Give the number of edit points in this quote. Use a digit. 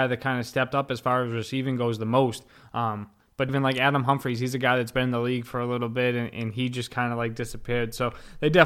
1